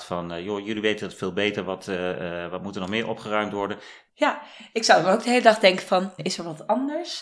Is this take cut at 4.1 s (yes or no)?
yes